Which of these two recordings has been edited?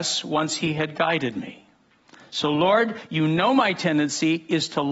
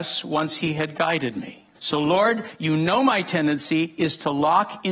second; 1 cut; at 1.7 s

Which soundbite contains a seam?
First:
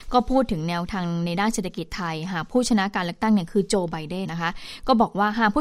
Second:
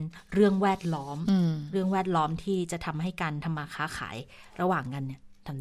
first; 1 cut; at 4.2 s

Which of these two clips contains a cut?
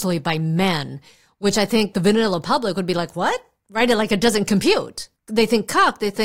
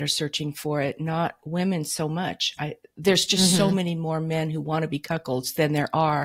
first; 1 cut; at 1.9 s

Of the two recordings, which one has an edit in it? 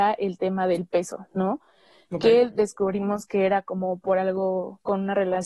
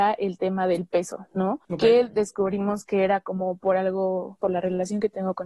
second; 2 cuts; at 1.6 s, 4.4 s

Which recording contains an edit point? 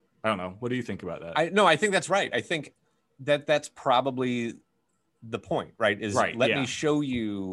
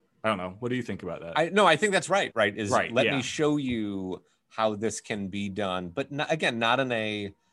second; 1 cut; at 2.3 s

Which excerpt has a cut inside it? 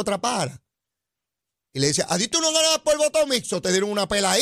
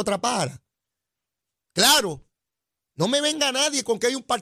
second; 1 cut; at 1.6 s

